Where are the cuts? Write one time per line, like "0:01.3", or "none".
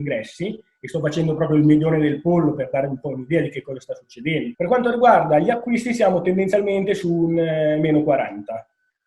0:04.5